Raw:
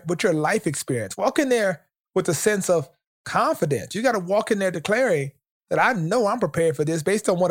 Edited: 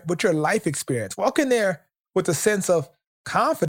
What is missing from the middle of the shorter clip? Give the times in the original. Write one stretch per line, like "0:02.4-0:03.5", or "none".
none